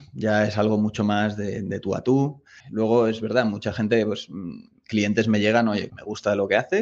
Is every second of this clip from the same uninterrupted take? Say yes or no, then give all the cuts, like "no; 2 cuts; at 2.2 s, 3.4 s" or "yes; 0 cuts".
no; 2 cuts; at 2.6 s, 5.9 s